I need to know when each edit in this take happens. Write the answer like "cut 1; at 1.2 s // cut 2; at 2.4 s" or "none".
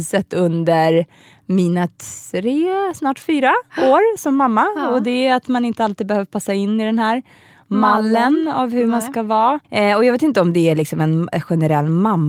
cut 1; at 9.6 s